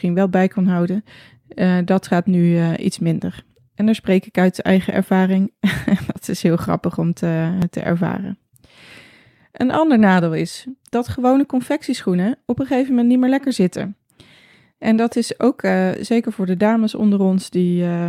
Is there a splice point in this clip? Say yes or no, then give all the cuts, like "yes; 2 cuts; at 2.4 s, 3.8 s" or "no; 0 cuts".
no; 0 cuts